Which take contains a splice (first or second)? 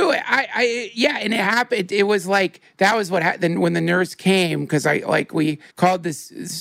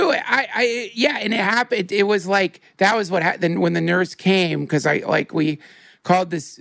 first